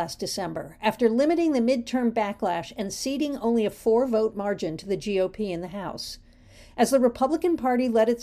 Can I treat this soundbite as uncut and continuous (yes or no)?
yes